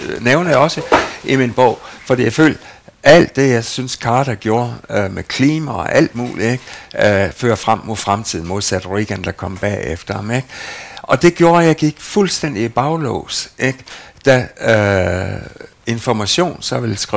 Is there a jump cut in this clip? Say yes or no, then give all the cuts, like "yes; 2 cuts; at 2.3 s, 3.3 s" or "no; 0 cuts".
no; 0 cuts